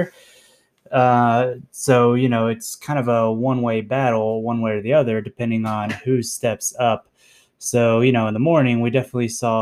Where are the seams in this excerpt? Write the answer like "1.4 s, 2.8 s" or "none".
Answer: none